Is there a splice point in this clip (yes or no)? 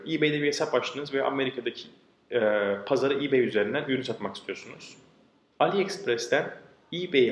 yes